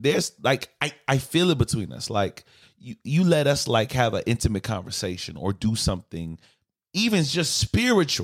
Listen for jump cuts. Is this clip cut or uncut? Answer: uncut